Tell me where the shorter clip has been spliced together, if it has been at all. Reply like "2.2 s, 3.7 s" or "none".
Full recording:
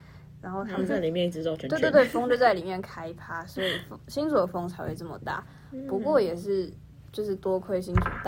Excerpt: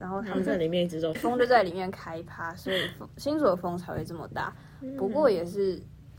1.1 s